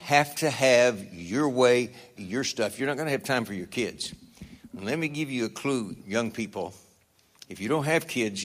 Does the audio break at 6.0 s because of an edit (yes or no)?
yes